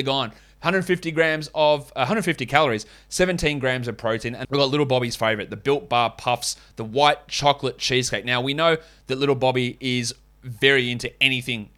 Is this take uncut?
no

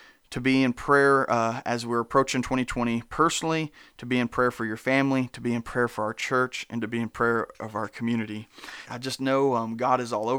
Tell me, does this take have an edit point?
yes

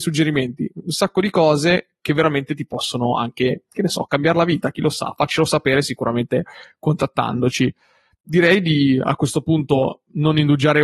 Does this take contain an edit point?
no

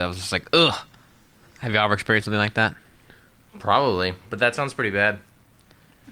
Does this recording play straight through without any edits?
yes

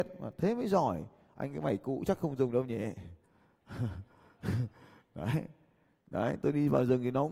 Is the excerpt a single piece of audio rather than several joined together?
yes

